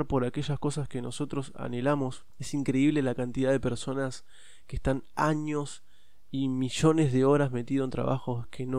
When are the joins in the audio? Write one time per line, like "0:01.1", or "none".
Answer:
none

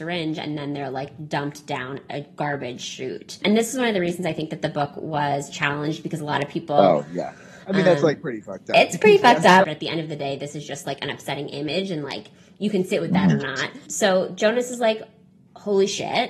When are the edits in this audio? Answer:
0:09.6

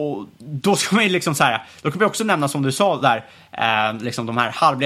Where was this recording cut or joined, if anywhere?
none

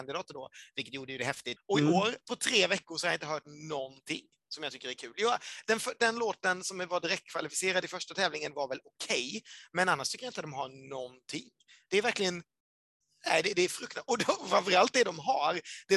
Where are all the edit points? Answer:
0:01.6

